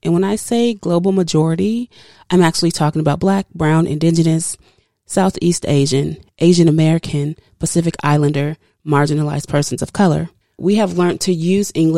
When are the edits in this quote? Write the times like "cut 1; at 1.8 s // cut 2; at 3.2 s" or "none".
cut 1; at 6.3 s // cut 2; at 10.4 s